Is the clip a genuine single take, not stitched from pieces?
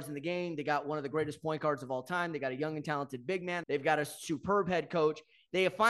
no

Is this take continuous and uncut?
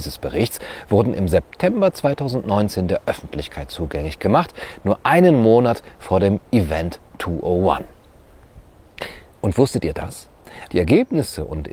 no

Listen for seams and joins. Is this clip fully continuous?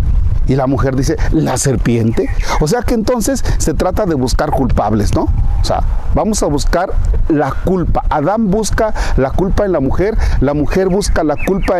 yes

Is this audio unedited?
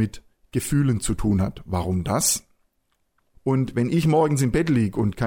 no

